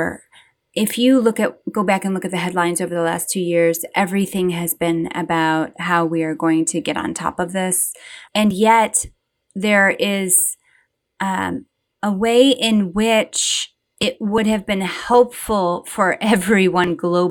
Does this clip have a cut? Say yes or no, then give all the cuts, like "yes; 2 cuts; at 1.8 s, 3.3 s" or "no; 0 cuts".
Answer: yes; 1 cut; at 8.2 s